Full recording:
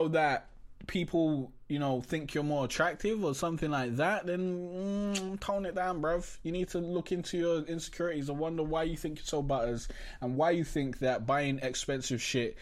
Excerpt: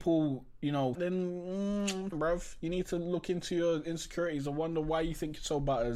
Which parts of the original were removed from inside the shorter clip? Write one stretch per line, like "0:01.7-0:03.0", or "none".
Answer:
0:02.0-0:04.2
0:05.4-0:05.9